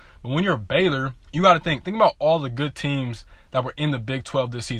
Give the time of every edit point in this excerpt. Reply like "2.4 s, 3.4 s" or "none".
1.2 s